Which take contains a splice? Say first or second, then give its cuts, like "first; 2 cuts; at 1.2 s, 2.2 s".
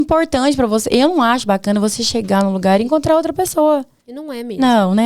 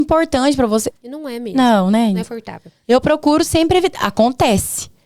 second; 2 cuts; at 0.9 s, 2.2 s